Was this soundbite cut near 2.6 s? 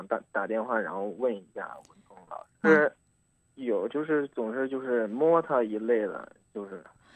yes; 1 cut; at 2.6 s

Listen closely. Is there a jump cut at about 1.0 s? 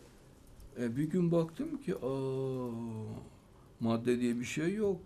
no; 0 cuts

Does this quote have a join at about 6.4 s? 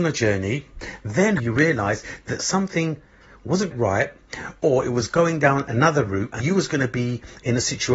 yes; 3 cuts; at 1.4 s, 3.7 s, 6.4 s

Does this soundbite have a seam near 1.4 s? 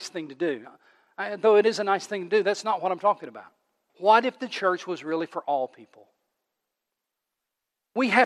no; 1 cut; at 3.9 s

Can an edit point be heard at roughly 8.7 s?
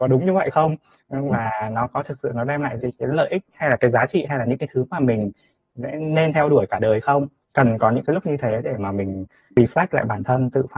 no; 2 cuts; at 2.8 s, 3.8 s

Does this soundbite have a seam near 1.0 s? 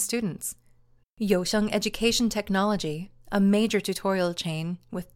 yes; 1 cut; at 1.0 s

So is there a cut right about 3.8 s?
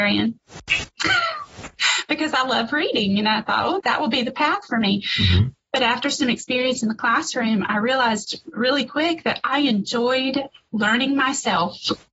yes; 1 cut; at 3.8 s

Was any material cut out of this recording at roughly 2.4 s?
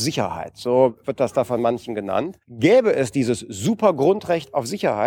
yes; 1 cut; at 2.4 s

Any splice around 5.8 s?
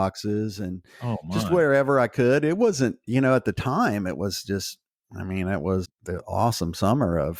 yes; 1 cut; at 5.8 s

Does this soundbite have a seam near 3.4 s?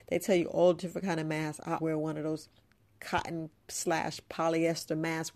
no; 1 cut; at 1.8 s

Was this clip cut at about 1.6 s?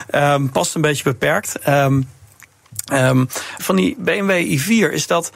no; 1 cut; at 3.6 s

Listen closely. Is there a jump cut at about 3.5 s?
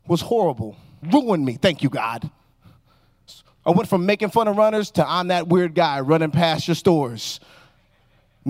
no; 1 cut; at 1.0 s

